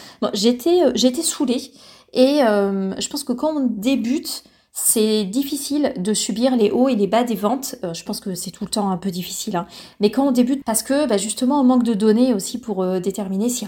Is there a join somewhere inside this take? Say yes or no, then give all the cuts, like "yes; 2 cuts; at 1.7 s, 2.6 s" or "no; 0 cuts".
yes; 1 cut; at 10.6 s